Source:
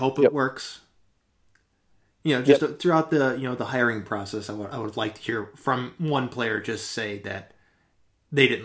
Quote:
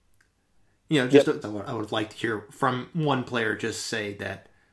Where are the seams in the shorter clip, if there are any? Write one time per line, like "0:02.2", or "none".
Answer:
0:01.4

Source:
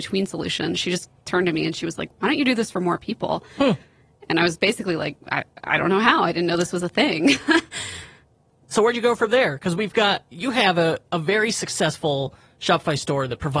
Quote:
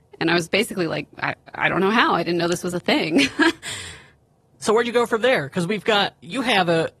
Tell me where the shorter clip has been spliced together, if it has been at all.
none

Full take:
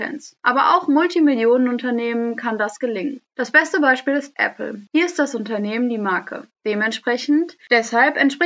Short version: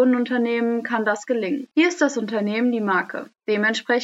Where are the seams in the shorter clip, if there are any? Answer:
0:01.7

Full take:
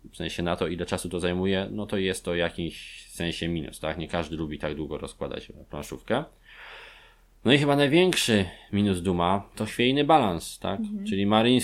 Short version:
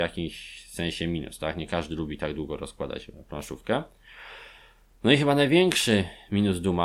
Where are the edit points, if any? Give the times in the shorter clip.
none

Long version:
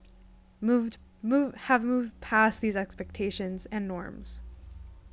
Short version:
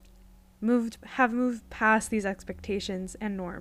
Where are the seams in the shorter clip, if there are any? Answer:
0:01.0

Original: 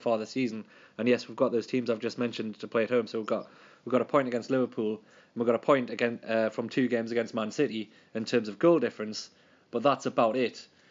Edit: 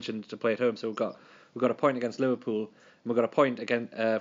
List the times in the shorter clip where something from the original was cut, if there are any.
none

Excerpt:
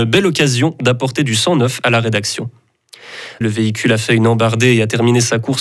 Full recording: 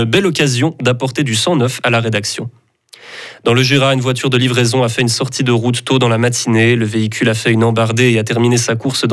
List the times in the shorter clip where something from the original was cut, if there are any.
0:03.4

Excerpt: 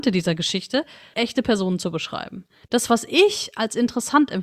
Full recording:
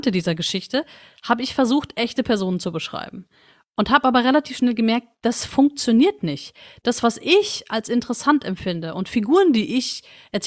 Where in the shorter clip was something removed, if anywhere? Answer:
0:01.1
0:02.6

